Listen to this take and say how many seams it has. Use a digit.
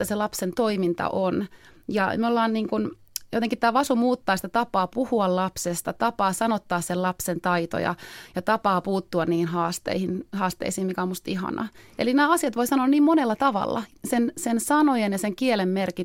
1